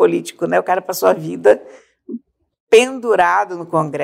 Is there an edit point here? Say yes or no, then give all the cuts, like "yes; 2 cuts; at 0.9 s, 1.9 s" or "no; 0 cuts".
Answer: no; 0 cuts